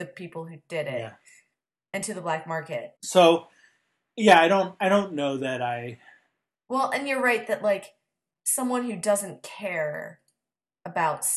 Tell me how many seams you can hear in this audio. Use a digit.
1